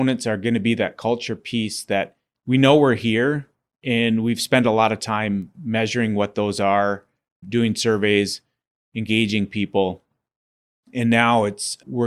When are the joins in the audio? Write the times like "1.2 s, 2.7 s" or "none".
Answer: none